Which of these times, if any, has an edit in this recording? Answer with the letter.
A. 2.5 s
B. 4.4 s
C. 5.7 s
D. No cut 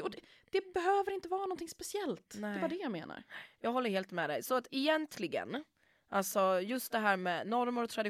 D